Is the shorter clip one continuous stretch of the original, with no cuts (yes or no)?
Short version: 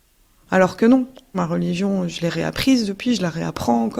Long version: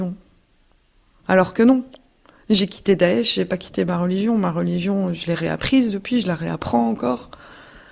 no